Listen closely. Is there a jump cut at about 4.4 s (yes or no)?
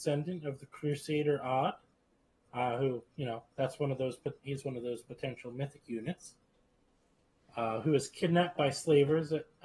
yes